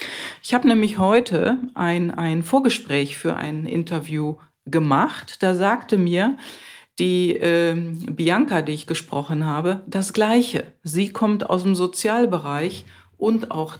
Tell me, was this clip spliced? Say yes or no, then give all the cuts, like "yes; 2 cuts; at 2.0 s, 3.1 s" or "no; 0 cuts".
no; 0 cuts